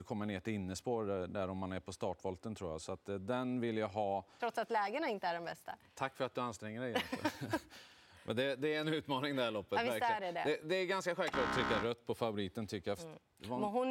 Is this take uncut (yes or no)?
no